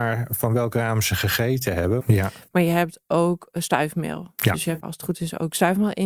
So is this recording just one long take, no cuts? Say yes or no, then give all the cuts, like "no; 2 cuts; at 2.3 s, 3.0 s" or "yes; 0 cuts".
no; 2 cuts; at 2.0 s, 4.8 s